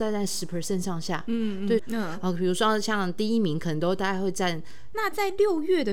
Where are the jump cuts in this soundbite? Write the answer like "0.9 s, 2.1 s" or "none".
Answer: 1.8 s, 4.9 s